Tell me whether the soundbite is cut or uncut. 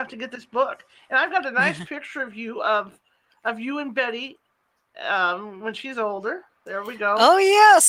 uncut